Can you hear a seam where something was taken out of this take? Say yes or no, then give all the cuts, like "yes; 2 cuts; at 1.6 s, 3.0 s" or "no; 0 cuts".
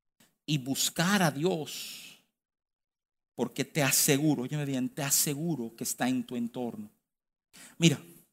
no; 0 cuts